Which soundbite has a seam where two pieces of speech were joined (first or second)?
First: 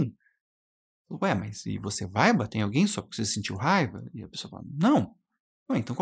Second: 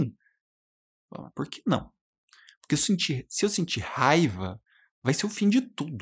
second